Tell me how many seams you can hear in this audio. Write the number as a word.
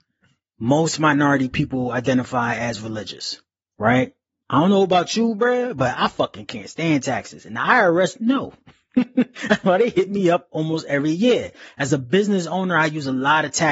one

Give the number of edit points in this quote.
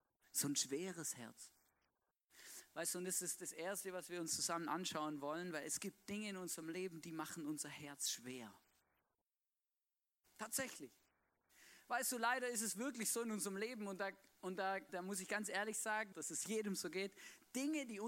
two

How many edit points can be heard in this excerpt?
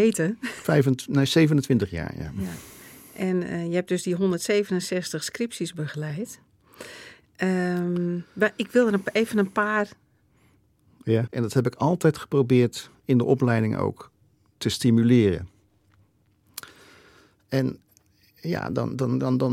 one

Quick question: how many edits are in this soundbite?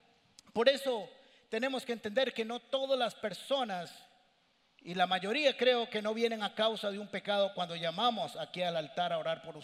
zero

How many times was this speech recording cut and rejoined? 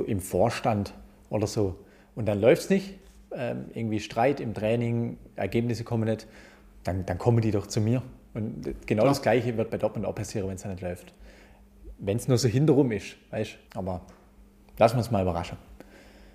one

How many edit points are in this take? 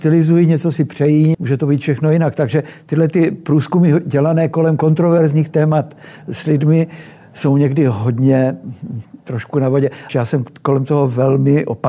two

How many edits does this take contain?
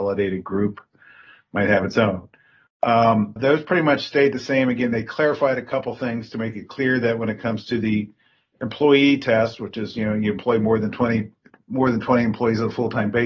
one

